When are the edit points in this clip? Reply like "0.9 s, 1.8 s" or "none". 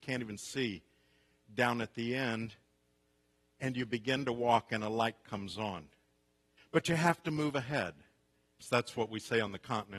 6.6 s, 8.6 s